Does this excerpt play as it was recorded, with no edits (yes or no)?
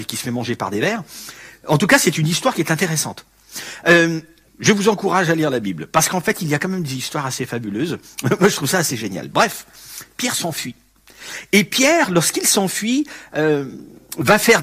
no